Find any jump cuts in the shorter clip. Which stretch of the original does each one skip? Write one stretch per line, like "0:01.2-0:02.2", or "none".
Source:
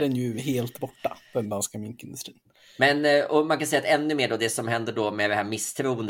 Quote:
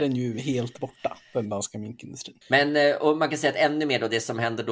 0:02.4-0:02.7